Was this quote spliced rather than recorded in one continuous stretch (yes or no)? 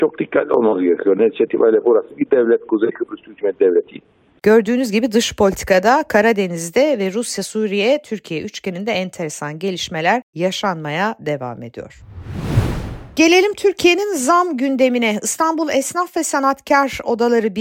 yes